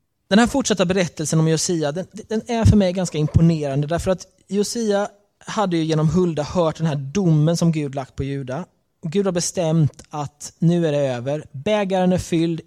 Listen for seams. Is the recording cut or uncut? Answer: uncut